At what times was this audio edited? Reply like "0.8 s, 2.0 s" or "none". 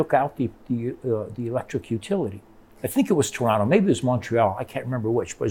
none